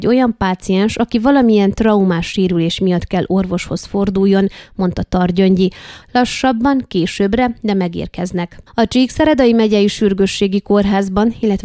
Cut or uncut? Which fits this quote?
cut